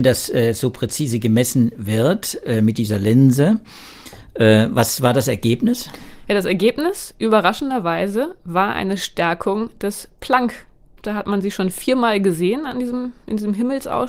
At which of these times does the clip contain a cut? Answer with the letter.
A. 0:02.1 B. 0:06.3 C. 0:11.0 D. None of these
C